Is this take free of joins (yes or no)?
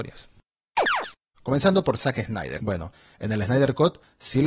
no